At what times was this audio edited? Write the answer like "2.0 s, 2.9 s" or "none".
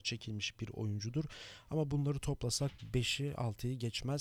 none

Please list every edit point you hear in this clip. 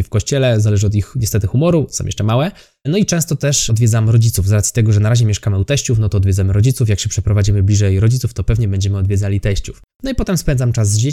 9.9 s

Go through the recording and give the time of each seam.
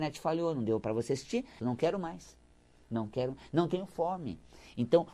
1.6 s

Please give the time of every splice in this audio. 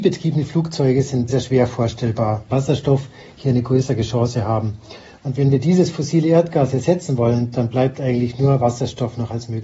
1.3 s, 2.5 s, 5.2 s

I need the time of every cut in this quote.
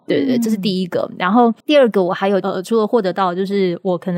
1.6 s

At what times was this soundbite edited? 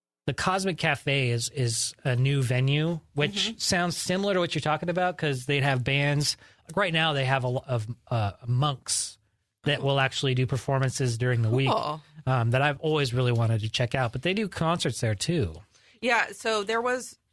none

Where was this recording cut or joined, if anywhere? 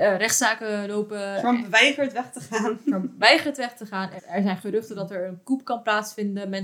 4.2 s

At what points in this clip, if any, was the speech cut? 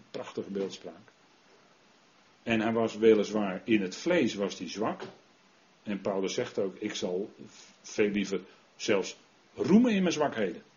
2.2 s

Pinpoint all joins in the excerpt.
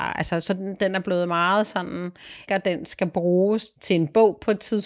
2.5 s

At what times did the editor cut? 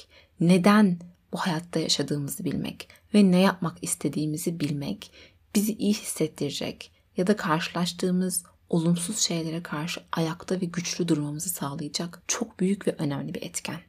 none

